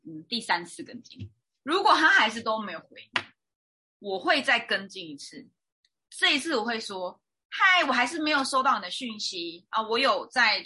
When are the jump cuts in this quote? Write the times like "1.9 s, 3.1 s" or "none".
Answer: none